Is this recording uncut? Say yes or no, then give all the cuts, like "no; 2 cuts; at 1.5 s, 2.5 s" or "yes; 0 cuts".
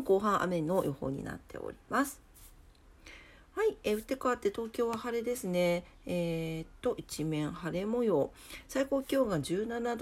yes; 0 cuts